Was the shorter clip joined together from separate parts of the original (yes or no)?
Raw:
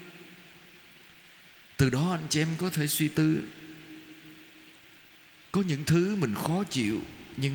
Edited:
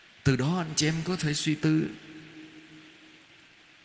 no